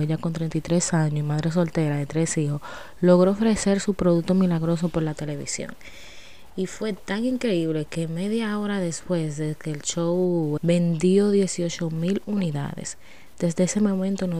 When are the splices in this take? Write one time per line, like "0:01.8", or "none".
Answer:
0:10.6